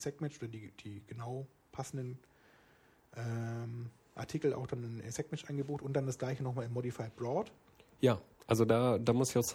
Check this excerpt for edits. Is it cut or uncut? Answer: uncut